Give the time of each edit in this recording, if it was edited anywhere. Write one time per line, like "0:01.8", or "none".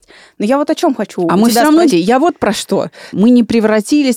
0:01.9
0:03.1